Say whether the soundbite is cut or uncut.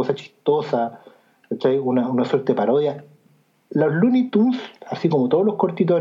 uncut